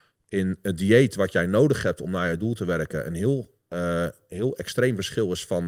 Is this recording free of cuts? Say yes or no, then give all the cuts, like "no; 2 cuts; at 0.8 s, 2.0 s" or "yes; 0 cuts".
yes; 0 cuts